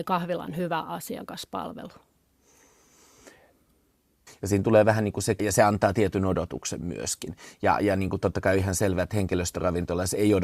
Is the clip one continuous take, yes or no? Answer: no